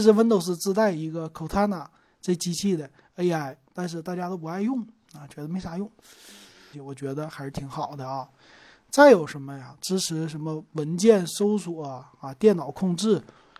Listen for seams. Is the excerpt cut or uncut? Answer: cut